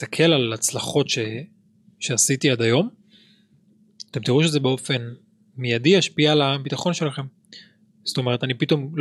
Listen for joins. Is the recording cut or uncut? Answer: uncut